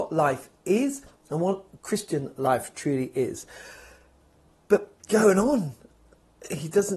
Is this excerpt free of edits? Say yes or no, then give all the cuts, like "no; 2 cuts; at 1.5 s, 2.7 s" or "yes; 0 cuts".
no; 1 cut; at 5.0 s